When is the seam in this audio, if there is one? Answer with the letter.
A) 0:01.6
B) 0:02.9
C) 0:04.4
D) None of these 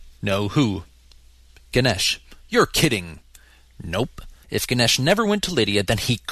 C